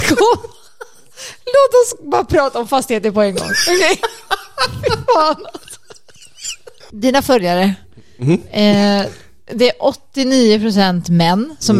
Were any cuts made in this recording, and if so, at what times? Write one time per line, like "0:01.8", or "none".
none